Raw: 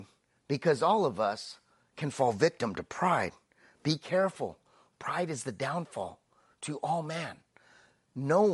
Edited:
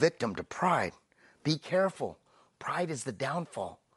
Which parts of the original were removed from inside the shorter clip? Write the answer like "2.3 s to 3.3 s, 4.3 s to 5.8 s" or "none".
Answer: none